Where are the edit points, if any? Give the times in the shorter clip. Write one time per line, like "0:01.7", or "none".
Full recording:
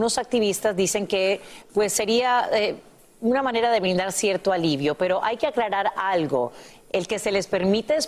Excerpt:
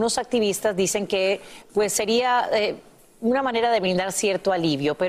none